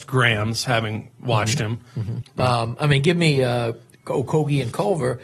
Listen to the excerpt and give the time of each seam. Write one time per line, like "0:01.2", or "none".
0:02.2